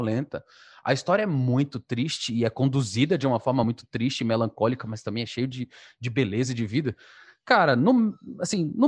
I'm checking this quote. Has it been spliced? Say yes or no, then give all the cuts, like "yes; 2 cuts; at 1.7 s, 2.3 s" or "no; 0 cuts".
no; 0 cuts